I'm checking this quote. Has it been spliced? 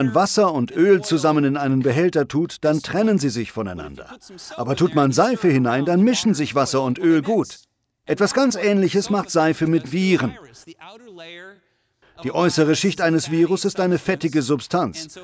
no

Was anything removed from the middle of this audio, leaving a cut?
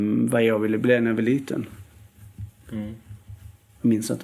no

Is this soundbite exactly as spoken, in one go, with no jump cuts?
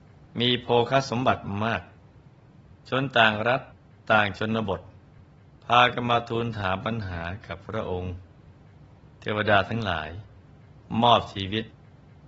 yes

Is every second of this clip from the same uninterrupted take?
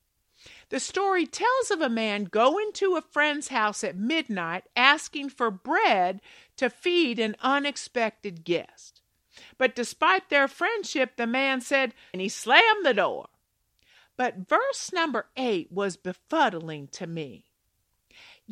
no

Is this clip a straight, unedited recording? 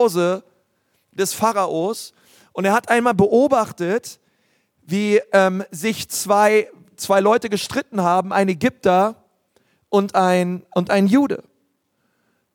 yes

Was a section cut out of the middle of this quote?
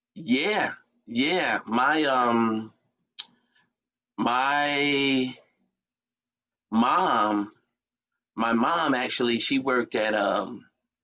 no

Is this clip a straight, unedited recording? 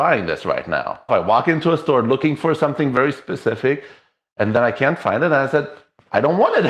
no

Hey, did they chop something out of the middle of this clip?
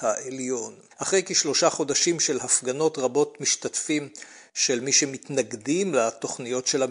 yes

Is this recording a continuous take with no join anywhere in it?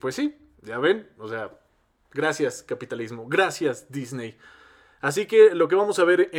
yes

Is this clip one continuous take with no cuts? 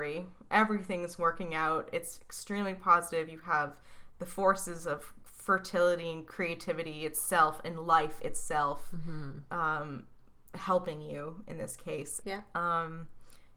no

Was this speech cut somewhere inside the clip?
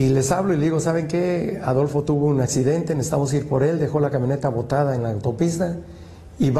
no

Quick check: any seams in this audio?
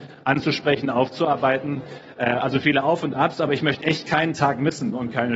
no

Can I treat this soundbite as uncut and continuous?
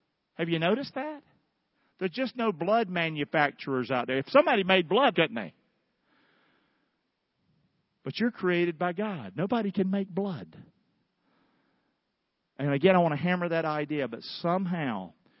no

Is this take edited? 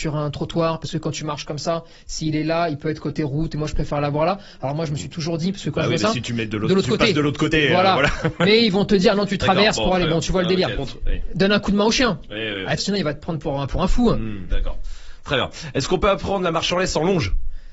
yes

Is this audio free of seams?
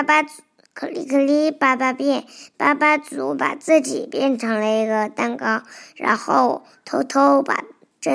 yes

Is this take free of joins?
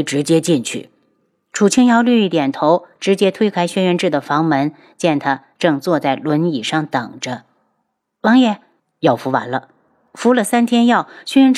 no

